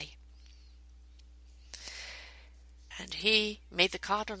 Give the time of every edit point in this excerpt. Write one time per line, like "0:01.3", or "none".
0:02.9